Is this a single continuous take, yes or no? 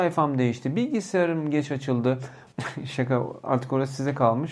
no